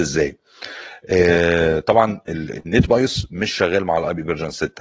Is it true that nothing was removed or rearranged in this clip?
yes; 0 cuts

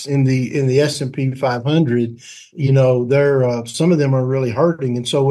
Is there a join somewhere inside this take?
yes; 1 cut; at 2.5 s

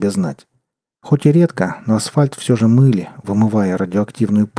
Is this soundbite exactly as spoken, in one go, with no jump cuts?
yes; 0 cuts

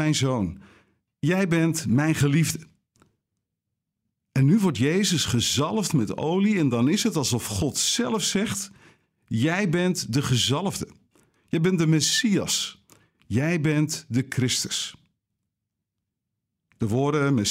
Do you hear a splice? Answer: no; 0 cuts

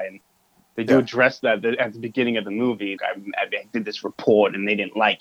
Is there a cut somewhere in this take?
yes; 1 cut; at 3.0 s

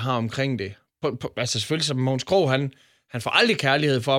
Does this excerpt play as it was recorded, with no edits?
yes; 0 cuts

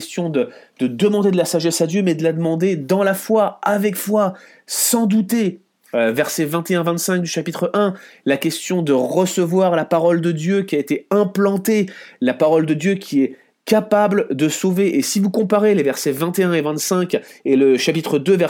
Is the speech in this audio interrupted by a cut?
no; 0 cuts

